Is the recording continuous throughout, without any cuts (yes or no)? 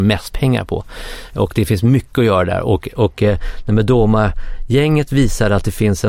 yes